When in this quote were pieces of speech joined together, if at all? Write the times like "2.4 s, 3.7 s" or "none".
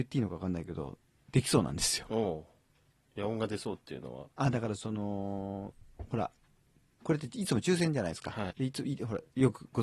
2.1 s, 4.3 s, 8.5 s

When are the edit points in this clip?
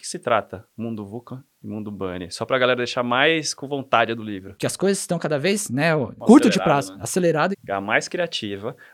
4.5 s, 7.5 s

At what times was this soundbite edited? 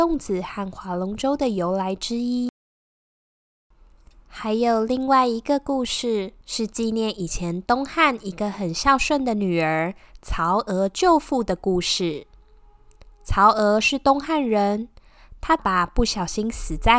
6.4 s, 15.6 s

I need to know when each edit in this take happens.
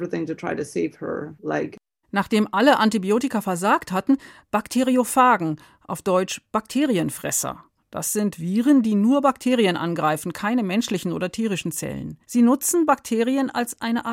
4.4 s, 12.2 s

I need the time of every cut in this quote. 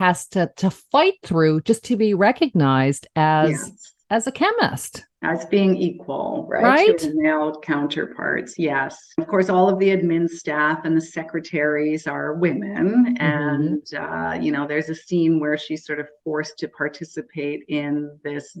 9.2 s

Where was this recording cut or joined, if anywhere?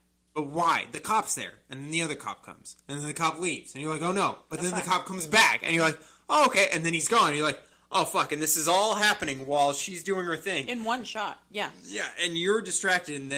none

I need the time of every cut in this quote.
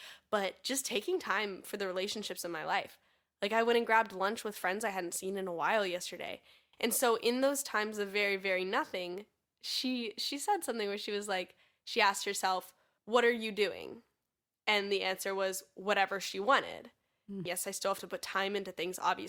6.7 s, 17.5 s

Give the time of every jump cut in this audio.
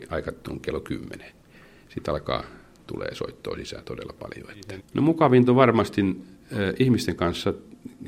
4.8 s

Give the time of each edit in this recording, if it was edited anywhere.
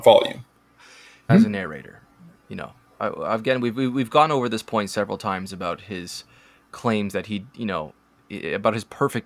1.3 s

